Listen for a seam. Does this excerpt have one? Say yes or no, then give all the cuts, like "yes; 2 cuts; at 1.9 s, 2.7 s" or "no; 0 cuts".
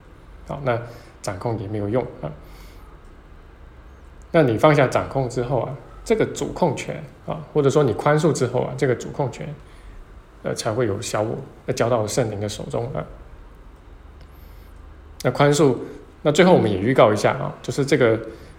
yes; 2 cuts; at 7.2 s, 16.1 s